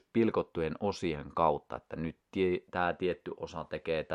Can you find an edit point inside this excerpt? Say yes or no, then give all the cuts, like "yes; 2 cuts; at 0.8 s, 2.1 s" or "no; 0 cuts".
no; 0 cuts